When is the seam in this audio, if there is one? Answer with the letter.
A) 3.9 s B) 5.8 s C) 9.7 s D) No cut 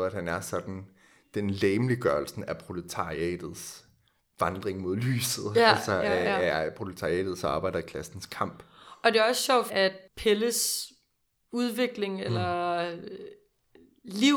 C